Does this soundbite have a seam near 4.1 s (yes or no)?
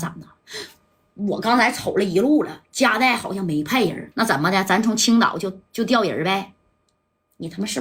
yes